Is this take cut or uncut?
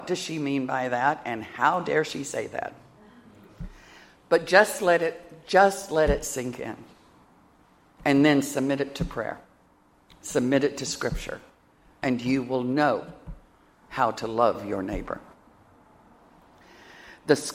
uncut